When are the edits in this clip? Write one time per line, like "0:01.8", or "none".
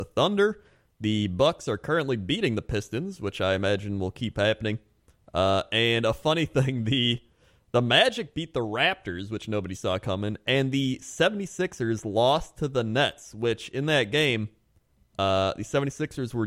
none